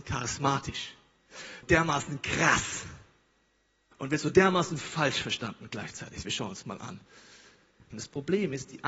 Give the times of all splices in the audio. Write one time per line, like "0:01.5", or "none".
0:01.6
0:07.9